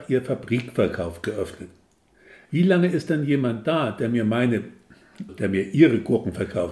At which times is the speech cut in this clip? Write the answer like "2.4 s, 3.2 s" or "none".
2.4 s, 5.3 s

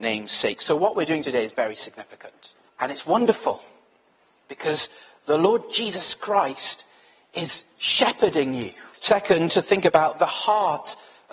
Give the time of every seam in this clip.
1.5 s, 2.7 s, 8.9 s

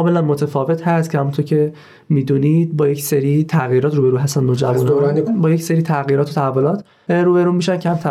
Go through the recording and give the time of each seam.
5.3 s

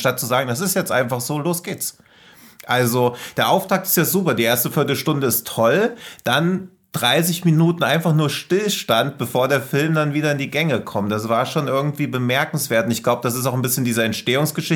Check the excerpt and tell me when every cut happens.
none

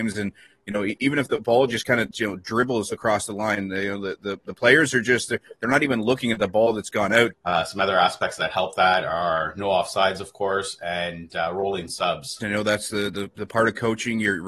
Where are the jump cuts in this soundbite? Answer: 7.3 s, 12.4 s

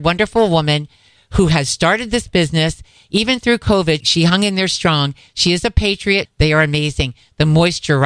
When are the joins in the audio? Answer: 4.0 s, 6.3 s

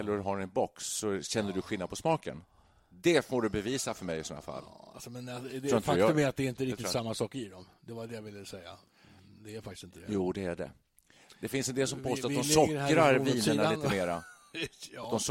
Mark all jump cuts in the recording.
none

